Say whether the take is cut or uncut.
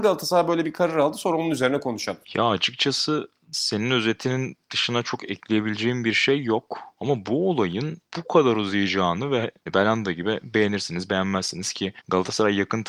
cut